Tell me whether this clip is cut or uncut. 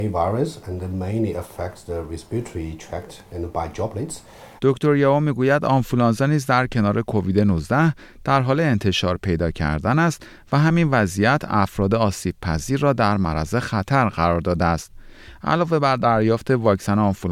cut